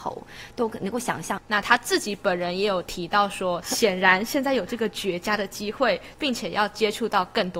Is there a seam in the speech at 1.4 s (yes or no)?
yes